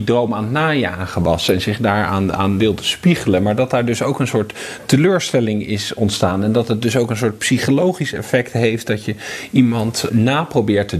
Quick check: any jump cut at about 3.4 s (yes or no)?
no